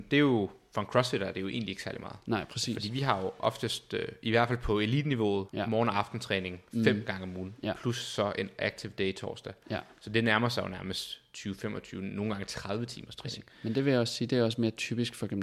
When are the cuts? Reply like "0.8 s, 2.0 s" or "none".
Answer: 5.5 s